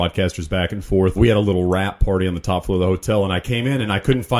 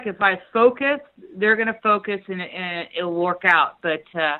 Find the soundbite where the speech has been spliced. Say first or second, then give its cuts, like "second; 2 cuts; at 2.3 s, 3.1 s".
first; 1 cut; at 1.2 s